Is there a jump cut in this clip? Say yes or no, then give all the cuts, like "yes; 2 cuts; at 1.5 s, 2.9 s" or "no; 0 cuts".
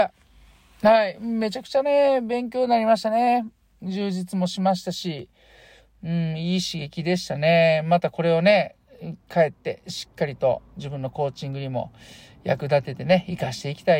no; 0 cuts